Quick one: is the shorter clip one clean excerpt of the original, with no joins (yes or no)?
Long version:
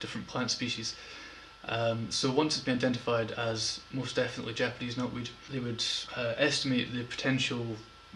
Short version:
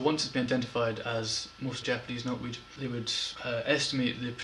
no